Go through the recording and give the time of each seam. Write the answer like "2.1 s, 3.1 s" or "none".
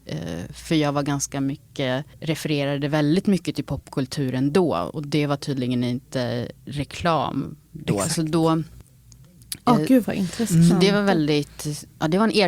2.1 s